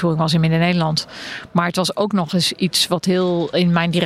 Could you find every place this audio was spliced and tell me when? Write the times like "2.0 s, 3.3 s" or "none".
none